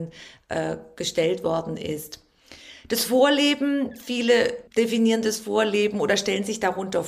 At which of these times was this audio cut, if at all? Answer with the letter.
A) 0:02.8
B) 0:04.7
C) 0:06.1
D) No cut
B